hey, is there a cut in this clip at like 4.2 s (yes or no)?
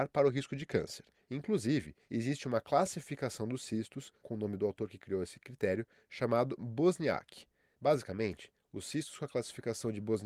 no